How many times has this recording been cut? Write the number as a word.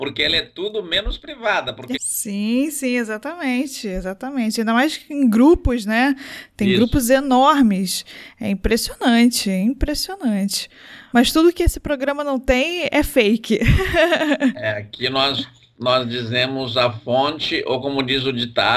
two